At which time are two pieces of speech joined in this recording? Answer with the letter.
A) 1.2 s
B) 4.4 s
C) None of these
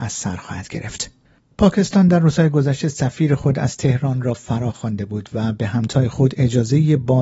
C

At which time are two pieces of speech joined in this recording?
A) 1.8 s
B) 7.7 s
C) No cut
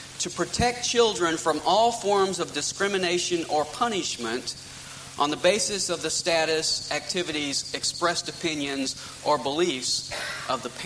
C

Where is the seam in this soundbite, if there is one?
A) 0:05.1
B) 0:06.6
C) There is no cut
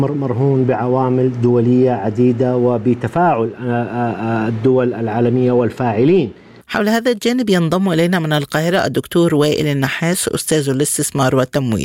B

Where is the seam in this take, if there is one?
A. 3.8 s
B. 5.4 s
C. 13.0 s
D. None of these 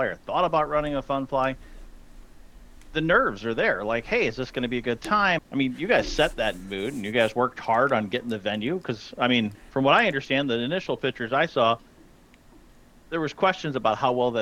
B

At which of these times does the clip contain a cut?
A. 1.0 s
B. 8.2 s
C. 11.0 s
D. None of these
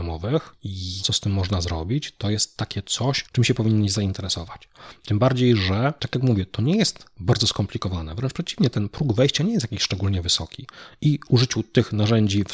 A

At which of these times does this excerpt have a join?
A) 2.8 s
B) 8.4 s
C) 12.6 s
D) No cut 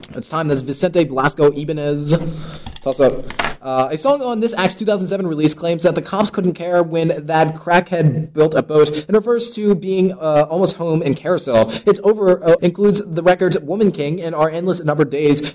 C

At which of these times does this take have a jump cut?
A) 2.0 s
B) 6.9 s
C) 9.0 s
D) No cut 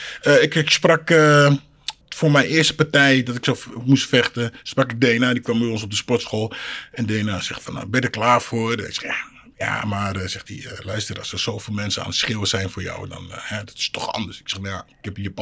A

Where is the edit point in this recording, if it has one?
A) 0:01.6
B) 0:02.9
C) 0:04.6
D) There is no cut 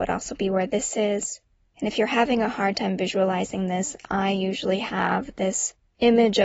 A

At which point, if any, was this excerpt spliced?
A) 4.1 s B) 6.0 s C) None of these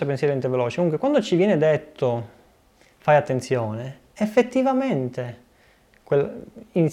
C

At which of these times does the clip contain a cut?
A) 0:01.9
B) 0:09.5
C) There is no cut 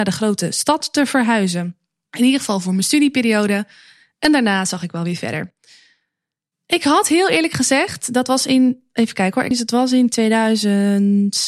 B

